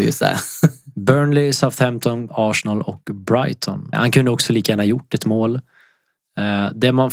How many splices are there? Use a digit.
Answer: 2